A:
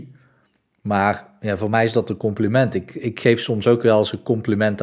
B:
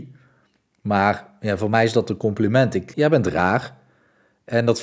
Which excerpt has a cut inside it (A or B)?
B